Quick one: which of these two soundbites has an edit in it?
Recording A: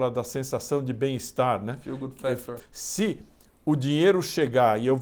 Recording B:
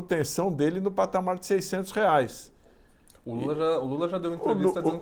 A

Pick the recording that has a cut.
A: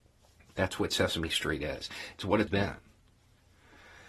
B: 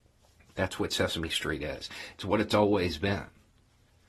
A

